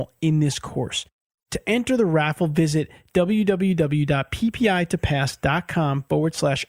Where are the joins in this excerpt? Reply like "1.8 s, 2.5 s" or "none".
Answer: none